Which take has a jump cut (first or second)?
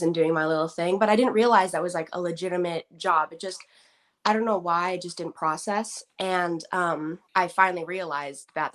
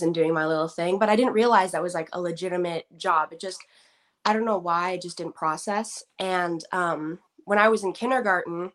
first